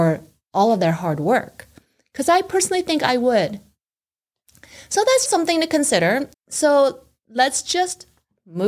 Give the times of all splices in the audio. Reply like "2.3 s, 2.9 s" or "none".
5.3 s, 6.3 s